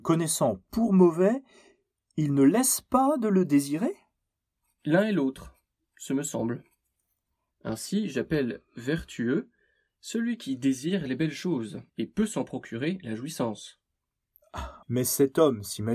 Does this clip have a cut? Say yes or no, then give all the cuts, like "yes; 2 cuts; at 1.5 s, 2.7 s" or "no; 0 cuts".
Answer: yes; 3 cuts; at 7.5 s, 11.9 s, 14.8 s